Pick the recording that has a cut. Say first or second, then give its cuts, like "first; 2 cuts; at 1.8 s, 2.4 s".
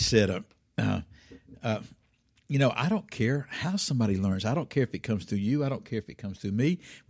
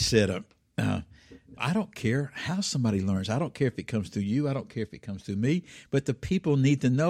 second; 2 cuts; at 1.6 s, 5.9 s